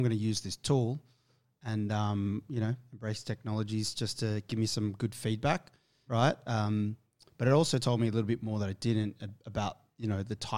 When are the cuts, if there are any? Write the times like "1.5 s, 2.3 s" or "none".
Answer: 6.1 s

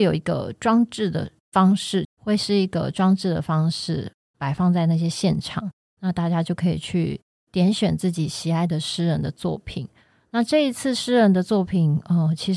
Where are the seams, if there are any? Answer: 2.0 s

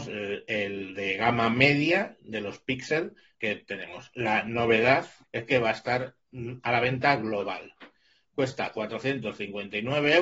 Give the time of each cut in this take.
3.3 s, 5.2 s

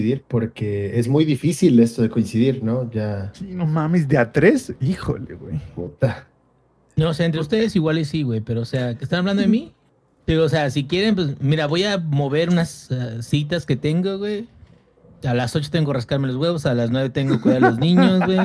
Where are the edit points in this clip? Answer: none

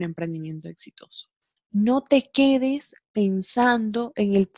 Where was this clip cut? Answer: 1.6 s

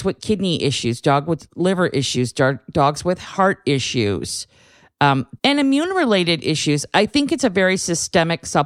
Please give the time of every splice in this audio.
5.4 s

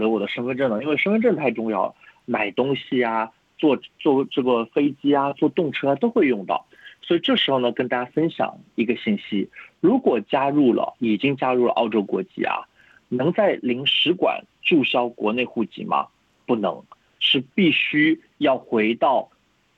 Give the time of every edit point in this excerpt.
none

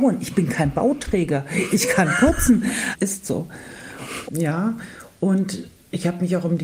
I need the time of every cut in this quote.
2.9 s, 4.3 s

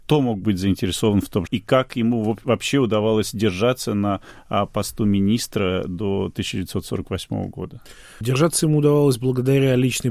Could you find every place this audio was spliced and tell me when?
1.5 s

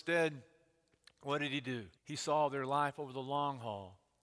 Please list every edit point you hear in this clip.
2.0 s

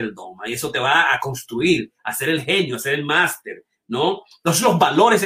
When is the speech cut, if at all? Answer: 4.3 s

